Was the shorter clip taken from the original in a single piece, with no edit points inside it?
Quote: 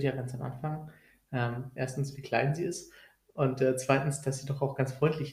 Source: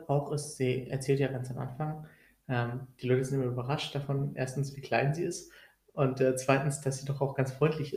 no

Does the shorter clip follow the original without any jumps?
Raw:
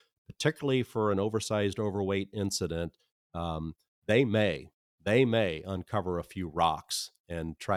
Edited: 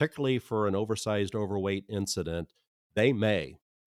no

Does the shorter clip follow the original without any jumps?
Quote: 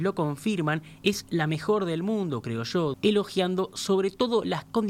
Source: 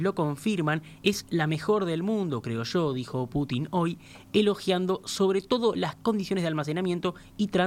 no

